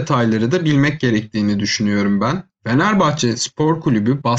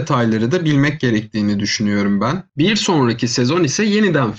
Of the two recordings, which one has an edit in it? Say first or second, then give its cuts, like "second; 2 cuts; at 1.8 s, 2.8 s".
second; 1 cut; at 2.5 s